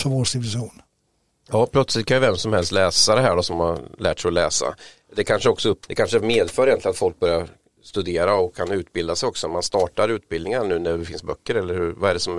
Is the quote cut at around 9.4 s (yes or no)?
no